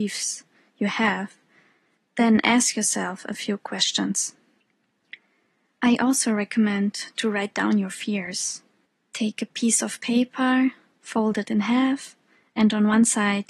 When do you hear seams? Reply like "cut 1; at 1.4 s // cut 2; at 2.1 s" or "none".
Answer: none